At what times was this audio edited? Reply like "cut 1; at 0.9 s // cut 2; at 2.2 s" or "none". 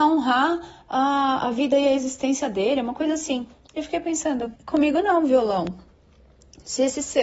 cut 1; at 4.6 s

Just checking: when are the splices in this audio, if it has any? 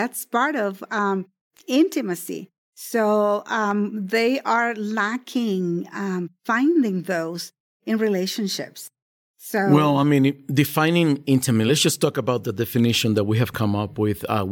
none

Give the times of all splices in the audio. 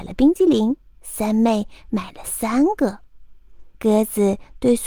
cut 1; at 0.9 s

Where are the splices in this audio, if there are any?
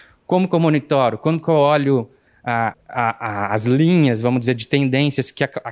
cut 1; at 2.7 s

